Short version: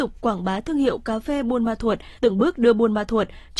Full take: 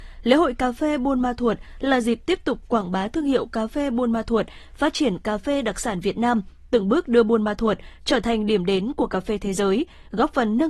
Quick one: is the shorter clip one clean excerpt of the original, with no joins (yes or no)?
no